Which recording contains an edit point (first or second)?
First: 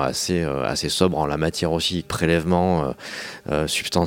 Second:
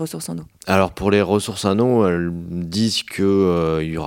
first